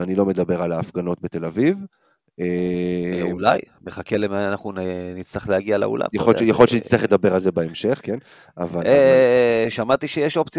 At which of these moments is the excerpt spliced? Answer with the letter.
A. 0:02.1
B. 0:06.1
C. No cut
C